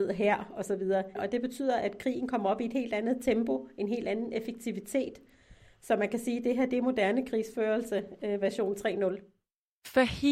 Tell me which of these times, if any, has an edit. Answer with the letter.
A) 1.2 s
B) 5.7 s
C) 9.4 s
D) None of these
A